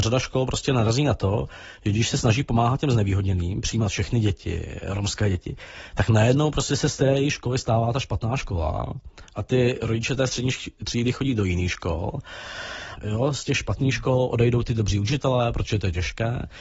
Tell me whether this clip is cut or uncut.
cut